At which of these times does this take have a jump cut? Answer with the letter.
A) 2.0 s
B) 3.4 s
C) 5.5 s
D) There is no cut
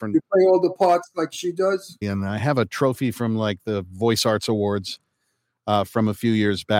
A